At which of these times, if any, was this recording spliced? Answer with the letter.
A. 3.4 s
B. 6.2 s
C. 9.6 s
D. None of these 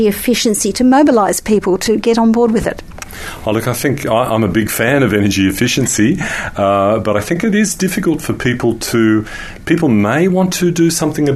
D